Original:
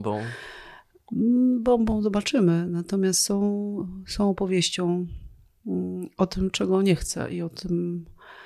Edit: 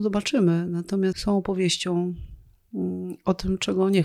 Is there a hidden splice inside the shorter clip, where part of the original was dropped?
yes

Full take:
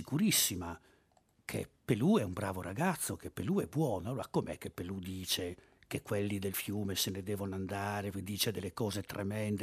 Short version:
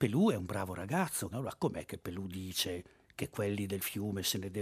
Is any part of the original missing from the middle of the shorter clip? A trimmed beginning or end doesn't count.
yes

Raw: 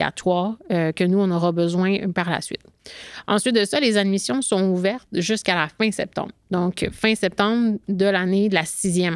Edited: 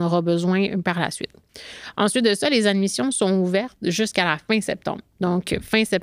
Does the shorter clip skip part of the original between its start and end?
no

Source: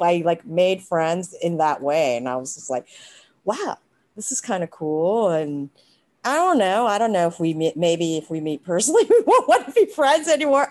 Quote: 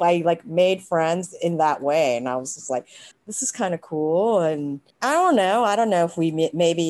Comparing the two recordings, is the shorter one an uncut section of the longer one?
no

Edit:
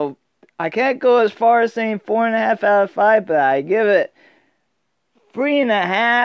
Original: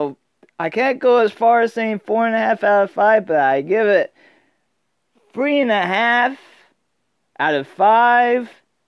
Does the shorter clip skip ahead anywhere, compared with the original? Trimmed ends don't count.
no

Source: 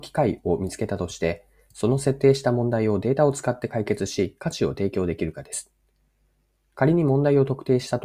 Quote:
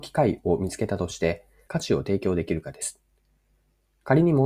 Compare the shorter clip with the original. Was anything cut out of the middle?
yes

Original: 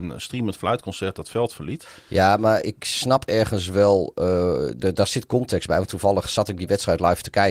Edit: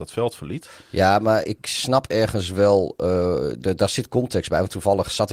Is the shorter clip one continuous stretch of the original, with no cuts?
yes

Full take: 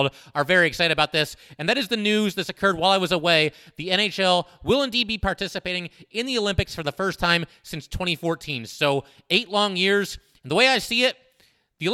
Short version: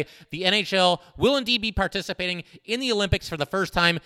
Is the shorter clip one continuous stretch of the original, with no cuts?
yes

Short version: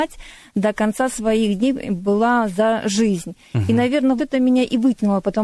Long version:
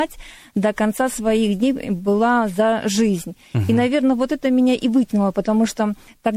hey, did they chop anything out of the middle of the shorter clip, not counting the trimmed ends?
yes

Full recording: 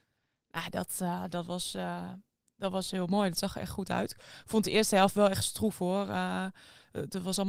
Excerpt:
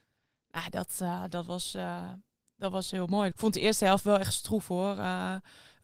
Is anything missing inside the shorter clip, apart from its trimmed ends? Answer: yes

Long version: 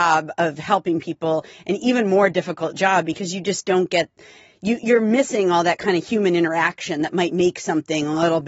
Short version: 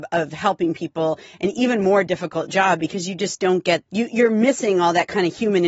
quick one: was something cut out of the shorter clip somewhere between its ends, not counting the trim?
yes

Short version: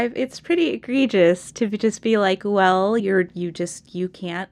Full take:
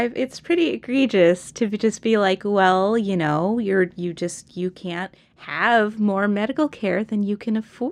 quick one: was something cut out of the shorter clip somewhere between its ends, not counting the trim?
yes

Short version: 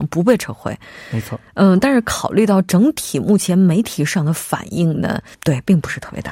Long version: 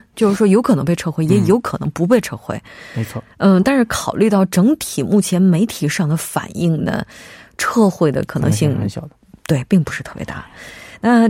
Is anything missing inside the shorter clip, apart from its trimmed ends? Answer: yes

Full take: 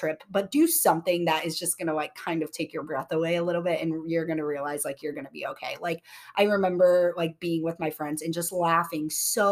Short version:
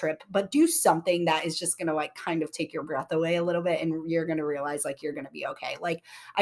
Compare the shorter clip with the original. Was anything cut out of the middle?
no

